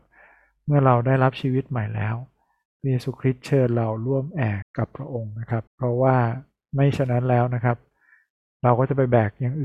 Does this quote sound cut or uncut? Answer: cut